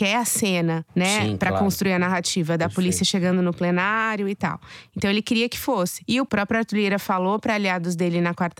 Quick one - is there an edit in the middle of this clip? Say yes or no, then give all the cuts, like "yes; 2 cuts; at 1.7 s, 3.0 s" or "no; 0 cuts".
no; 0 cuts